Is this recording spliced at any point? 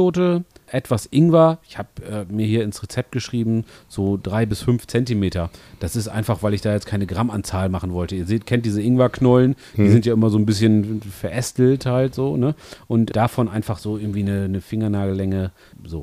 no; 0 cuts

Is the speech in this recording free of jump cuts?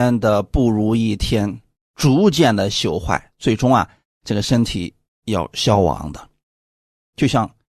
yes; 0 cuts

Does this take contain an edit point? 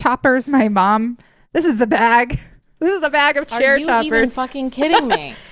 no; 0 cuts

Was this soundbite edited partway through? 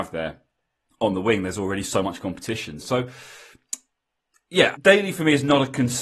yes; 2 cuts; at 2.8 s, 4.7 s

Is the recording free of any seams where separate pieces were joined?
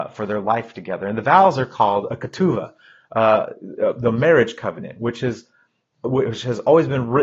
yes; 0 cuts

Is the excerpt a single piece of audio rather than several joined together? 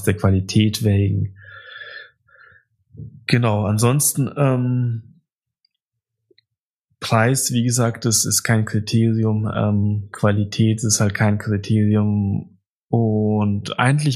yes; 0 cuts

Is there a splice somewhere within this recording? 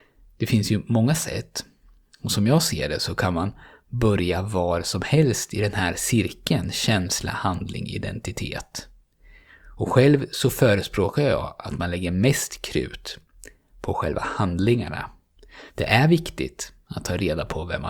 no; 0 cuts

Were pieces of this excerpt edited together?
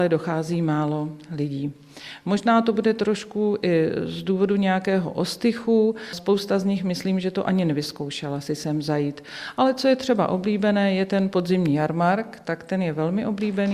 no; 0 cuts

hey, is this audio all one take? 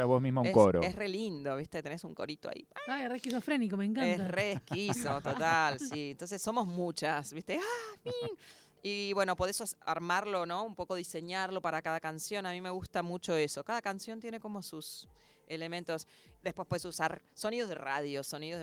yes; 0 cuts

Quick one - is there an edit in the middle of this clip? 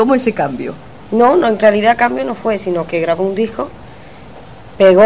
no; 0 cuts

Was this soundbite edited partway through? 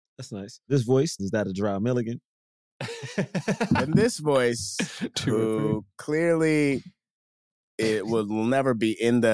yes; 1 cut; at 1.2 s

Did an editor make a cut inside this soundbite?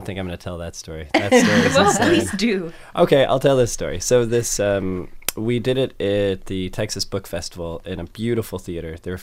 no; 0 cuts

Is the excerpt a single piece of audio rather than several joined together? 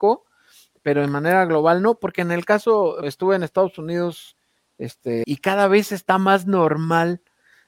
no; 2 cuts; at 3.0 s, 5.2 s

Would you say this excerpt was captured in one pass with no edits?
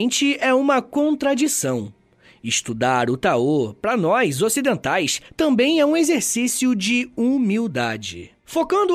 yes; 0 cuts

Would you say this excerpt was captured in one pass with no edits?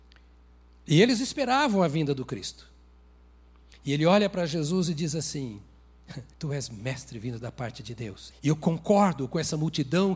no; 2 cuts; at 6.3 s, 8.3 s

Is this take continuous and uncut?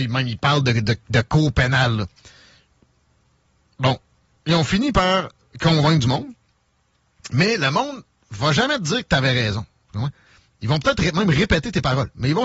yes; 0 cuts

